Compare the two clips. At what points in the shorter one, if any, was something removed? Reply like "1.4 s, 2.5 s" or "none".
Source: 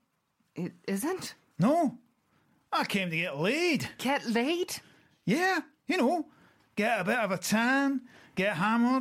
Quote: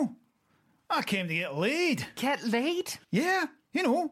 3.0 s